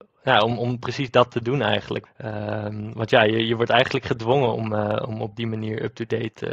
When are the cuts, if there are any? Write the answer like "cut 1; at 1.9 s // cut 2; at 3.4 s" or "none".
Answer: cut 1; at 2.1 s